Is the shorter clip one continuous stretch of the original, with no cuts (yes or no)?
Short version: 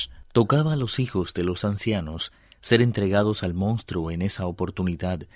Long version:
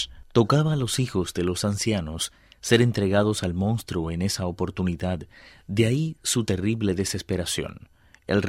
yes